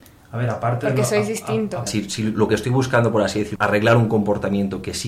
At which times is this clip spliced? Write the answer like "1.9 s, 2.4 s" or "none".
1.9 s, 3.6 s